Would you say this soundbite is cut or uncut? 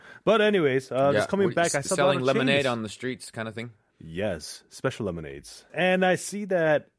cut